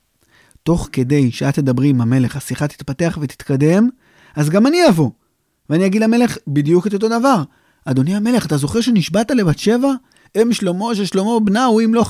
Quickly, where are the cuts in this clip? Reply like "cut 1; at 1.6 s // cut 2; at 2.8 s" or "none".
none